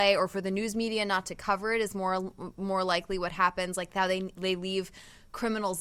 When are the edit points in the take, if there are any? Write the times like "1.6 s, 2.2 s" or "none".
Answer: none